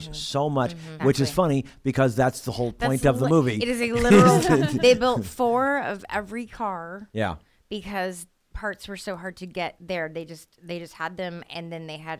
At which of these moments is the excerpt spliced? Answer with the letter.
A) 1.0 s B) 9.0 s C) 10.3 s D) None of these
A